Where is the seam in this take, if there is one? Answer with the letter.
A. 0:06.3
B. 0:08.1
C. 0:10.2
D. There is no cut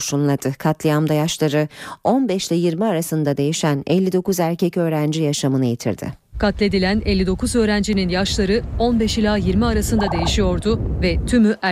A